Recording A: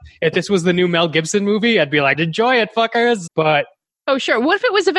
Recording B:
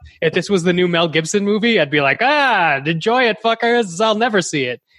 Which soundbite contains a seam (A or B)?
A